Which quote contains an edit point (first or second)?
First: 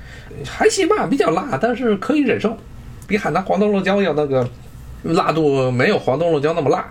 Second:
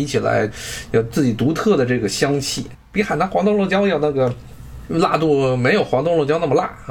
second